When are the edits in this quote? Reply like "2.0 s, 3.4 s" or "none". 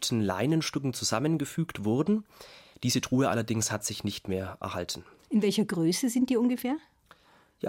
2.7 s